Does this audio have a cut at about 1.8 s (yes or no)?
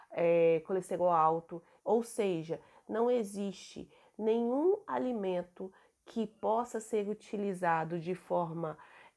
yes